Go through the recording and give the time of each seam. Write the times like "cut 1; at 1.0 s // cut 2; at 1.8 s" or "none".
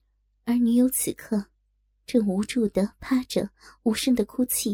none